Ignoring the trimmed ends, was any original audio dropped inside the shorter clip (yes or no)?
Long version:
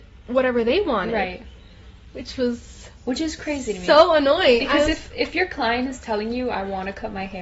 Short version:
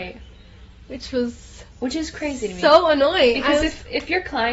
no